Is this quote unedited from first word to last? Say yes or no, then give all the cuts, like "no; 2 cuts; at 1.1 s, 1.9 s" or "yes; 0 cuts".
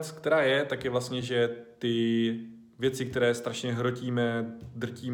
yes; 0 cuts